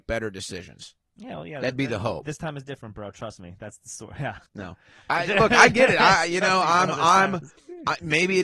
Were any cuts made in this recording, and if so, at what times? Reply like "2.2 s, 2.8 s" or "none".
4.5 s